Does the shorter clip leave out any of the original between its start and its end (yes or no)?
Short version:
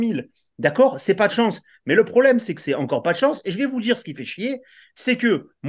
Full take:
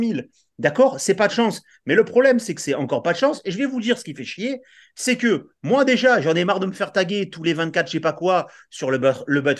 no